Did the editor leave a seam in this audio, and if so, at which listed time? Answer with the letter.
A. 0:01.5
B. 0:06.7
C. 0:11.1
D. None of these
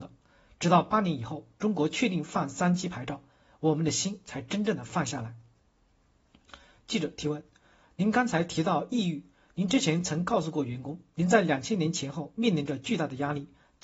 D